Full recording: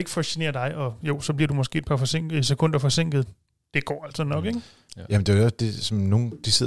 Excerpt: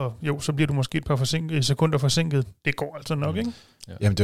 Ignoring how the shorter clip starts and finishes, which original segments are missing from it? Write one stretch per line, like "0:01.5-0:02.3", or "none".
0:03.4-0:03.7

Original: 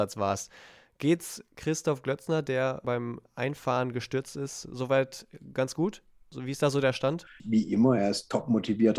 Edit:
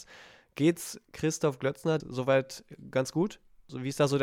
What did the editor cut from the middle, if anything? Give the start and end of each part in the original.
0:02.4-0:04.6

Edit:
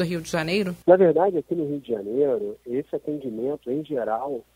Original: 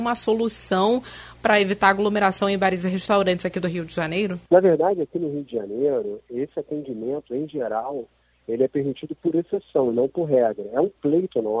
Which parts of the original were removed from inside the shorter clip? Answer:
none

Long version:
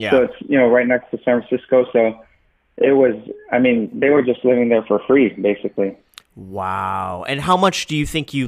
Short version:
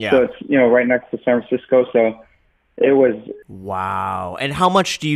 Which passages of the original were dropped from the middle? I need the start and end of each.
0:03.4-0:06.3

